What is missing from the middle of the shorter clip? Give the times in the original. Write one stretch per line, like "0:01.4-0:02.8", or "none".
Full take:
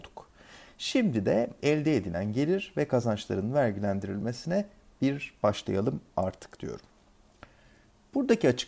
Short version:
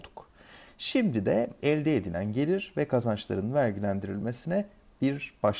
none